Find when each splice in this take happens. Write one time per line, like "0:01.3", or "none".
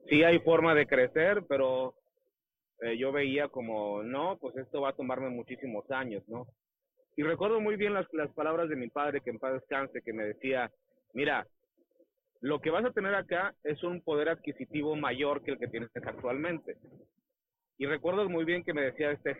0:07.0